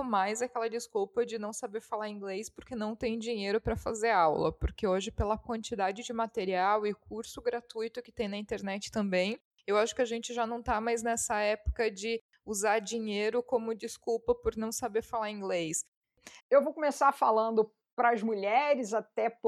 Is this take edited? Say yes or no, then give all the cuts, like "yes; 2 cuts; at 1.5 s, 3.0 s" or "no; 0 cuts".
yes; 1 cut; at 16.4 s